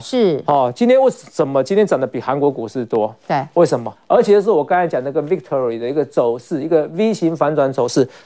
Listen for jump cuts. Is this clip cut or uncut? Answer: cut